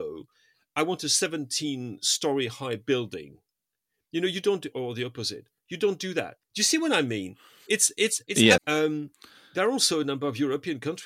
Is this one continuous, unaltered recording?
no; 2 cuts; at 4.7 s, 8.6 s

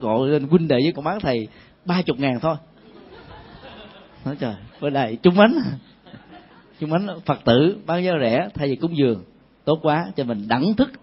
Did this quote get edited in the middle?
yes; 2 cuts; at 0.9 s, 4.7 s

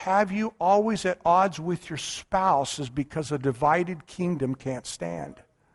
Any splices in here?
no; 0 cuts

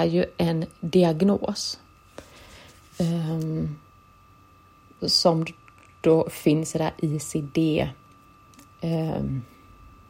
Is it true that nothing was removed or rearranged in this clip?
no; 1 cut; at 5.0 s

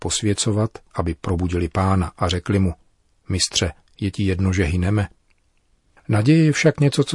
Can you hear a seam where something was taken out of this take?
yes; 2 cuts; at 0.9 s, 5.9 s

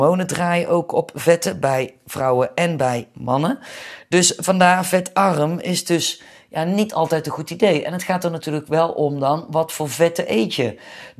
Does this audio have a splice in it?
no; 0 cuts

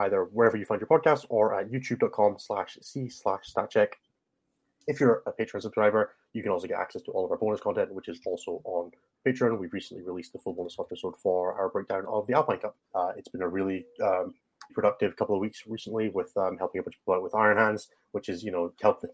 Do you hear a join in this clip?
yes; 2 cuts; at 12.9 s, 14.7 s

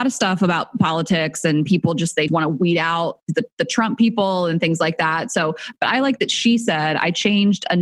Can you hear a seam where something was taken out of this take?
yes; 1 cut; at 2.3 s

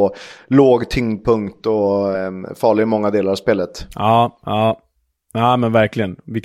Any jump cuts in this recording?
no; 0 cuts

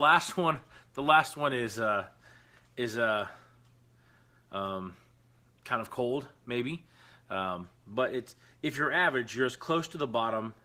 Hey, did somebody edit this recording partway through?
no; 0 cuts

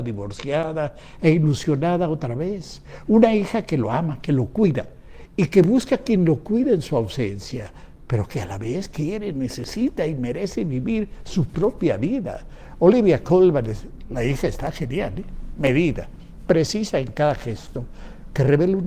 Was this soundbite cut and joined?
no; 0 cuts

